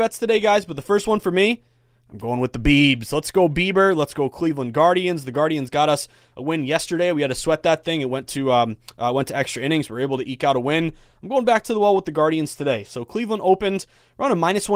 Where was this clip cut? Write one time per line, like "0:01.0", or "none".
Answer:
none